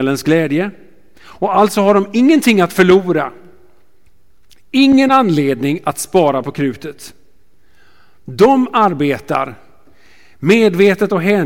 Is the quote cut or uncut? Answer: uncut